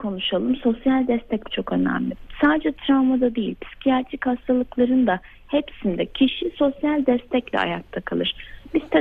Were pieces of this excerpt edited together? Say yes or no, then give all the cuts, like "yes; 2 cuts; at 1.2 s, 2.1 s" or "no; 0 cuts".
yes; 1 cut; at 1.4 s